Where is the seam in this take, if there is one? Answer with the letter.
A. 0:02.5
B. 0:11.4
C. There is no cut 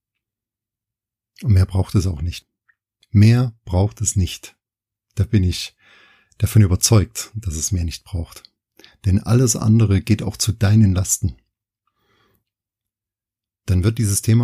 C